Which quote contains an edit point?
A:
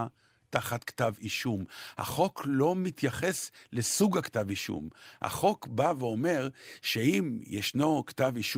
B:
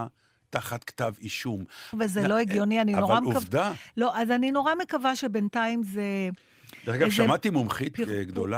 B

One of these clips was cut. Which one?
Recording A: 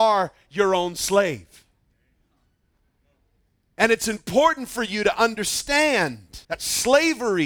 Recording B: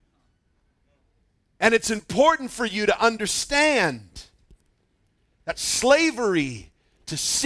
A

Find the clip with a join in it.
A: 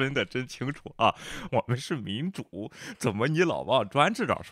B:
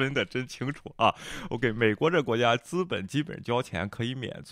A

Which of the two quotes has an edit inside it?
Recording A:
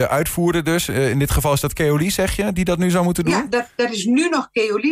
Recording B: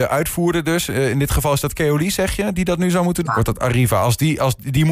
B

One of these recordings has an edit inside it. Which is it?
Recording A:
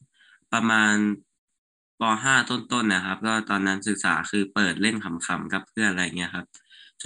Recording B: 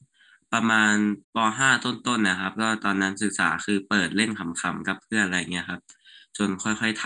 B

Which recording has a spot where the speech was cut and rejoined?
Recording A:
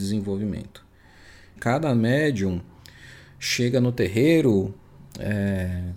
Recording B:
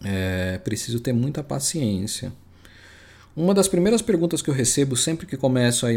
A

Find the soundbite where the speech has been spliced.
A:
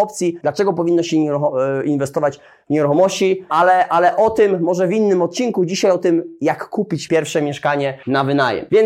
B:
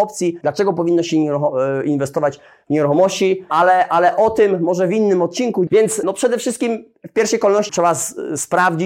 B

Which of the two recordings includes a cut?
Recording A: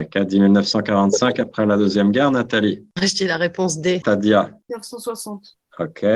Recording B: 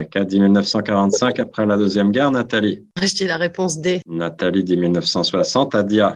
A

